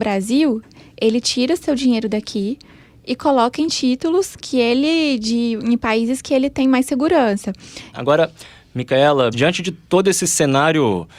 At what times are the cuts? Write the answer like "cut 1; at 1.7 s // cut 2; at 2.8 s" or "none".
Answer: cut 1; at 7.9 s // cut 2; at 9.3 s